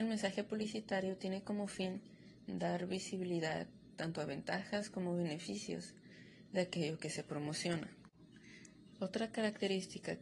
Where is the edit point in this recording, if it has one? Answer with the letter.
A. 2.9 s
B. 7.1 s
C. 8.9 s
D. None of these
C